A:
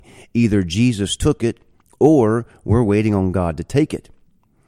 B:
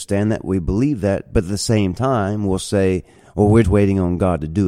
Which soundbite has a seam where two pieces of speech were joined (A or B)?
B